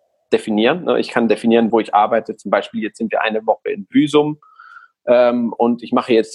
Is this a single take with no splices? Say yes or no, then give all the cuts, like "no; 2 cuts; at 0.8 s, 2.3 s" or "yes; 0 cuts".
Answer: no; 1 cut; at 1.7 s